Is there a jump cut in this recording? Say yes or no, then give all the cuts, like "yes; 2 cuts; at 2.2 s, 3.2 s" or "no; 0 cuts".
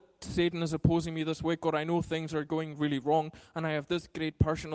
no; 0 cuts